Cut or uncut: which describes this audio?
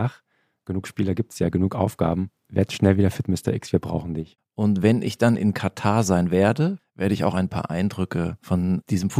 cut